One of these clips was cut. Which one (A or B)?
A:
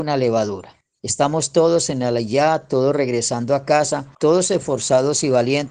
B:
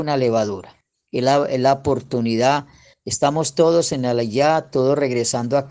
A